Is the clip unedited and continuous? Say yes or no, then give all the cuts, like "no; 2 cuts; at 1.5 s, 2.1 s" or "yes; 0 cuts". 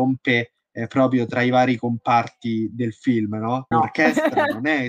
no; 1 cut; at 3.7 s